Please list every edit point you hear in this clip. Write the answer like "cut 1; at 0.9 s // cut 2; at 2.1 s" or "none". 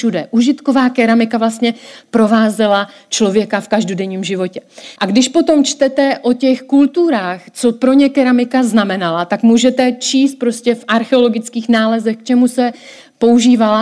cut 1; at 5.0 s